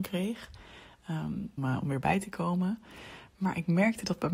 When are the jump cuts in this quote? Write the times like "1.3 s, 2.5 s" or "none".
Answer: 1.6 s